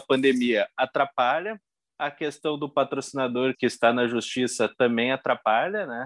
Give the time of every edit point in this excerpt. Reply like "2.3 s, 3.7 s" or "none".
3.5 s